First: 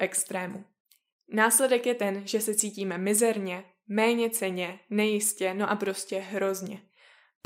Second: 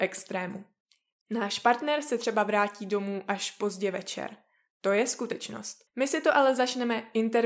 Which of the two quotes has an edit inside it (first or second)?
second